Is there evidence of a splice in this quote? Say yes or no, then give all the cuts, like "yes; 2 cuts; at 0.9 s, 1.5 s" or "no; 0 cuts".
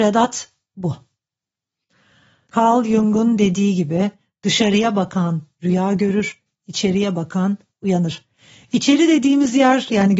yes; 1 cut; at 2.5 s